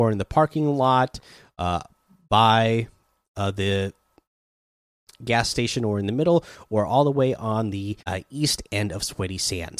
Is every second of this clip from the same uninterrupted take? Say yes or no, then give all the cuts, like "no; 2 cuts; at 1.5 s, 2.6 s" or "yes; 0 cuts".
no; 1 cut; at 8.0 s